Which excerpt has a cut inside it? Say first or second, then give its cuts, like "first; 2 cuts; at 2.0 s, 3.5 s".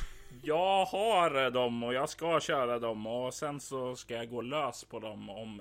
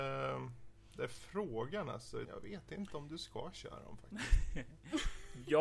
second; 1 cut; at 2.3 s